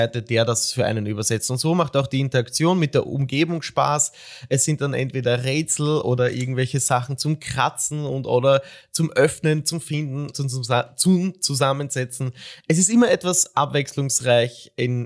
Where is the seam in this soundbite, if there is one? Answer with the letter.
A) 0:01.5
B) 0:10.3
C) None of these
B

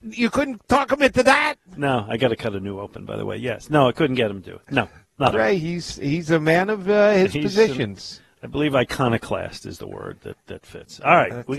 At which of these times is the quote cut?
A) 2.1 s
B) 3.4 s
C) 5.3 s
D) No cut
C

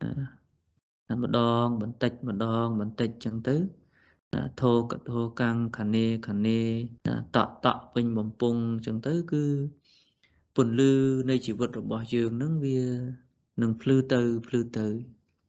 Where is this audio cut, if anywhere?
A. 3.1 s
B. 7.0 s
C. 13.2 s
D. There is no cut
B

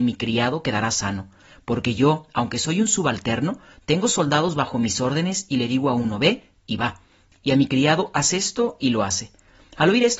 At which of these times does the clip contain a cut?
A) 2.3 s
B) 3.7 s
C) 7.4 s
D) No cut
C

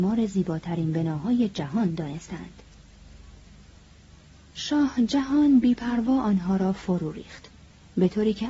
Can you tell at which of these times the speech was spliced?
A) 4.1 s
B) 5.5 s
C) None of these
C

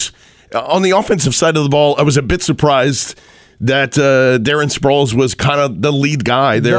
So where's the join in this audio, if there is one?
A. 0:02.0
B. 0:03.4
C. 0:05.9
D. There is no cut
D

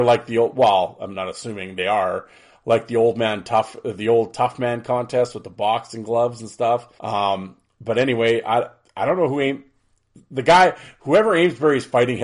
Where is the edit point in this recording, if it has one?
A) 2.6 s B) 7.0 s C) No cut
B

